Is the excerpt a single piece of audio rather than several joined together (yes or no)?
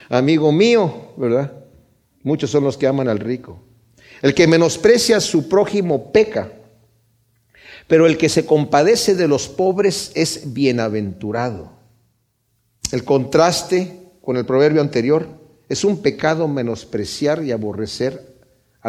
yes